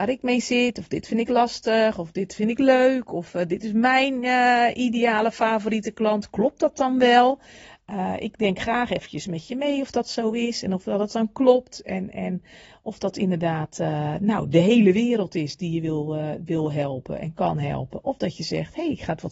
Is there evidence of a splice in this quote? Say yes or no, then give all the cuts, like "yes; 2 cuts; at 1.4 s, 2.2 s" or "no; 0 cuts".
no; 0 cuts